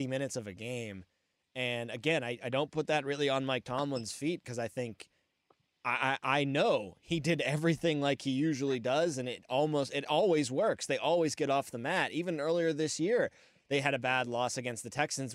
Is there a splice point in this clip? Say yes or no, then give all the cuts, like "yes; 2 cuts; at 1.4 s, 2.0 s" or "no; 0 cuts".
no; 0 cuts